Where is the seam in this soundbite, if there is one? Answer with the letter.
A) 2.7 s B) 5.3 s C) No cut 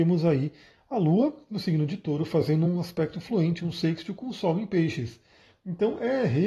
C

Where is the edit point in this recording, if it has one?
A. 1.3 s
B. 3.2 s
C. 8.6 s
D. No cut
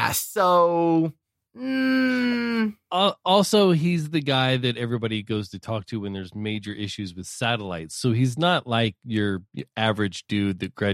D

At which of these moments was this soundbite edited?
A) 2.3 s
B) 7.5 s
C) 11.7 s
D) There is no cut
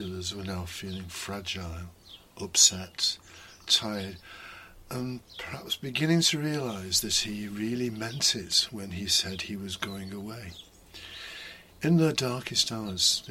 C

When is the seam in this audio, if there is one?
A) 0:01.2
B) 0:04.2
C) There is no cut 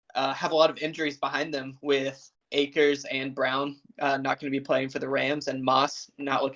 C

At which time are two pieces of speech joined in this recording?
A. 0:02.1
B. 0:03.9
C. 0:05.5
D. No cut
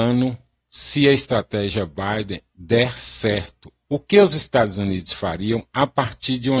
B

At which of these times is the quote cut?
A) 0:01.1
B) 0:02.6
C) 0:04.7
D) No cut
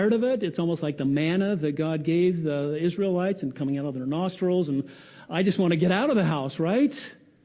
D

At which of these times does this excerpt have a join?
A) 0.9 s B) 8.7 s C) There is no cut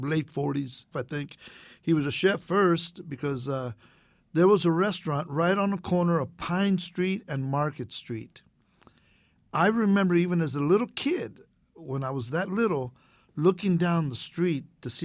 A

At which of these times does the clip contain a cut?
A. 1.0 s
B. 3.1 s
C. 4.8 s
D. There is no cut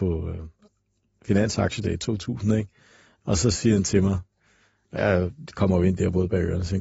D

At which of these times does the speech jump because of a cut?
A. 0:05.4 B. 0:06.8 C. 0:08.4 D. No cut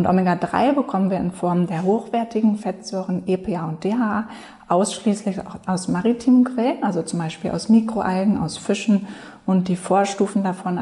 D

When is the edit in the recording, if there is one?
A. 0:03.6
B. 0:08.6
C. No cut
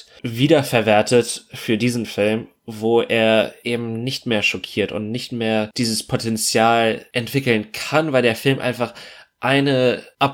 C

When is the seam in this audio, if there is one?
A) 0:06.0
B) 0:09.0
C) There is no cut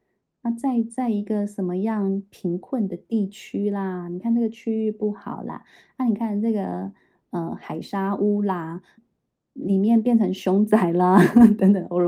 B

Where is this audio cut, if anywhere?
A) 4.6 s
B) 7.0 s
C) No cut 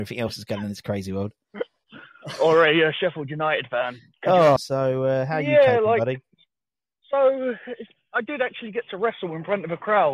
A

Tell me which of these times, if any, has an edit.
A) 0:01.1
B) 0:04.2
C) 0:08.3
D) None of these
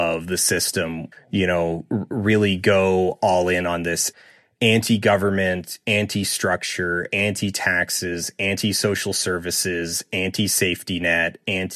A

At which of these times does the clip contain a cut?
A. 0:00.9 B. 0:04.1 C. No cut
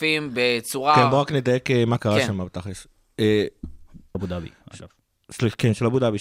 B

